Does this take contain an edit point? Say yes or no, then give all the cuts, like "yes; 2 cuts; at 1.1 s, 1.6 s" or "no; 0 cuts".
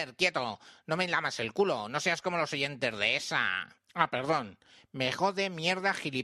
no; 0 cuts